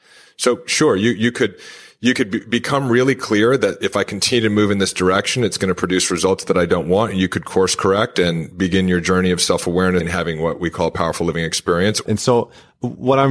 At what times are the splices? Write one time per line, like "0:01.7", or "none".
0:10.0
0:12.1